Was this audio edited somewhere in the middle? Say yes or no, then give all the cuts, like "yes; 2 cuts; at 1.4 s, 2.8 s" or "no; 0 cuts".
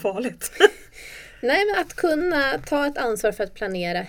yes; 1 cut; at 1.7 s